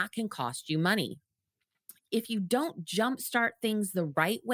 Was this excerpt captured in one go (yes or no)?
no